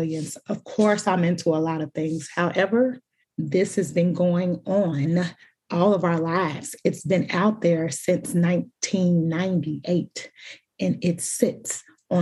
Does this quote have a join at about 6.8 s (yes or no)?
no